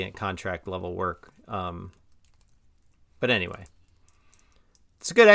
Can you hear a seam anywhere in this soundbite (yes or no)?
no